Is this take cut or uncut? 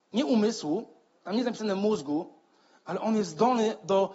uncut